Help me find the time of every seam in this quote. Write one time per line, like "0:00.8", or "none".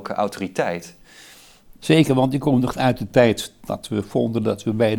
0:01.8